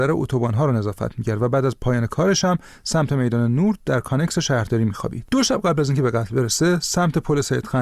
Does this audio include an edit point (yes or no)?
no